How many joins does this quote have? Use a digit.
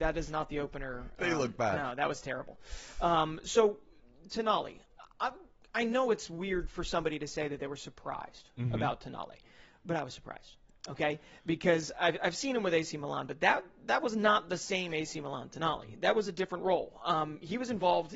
0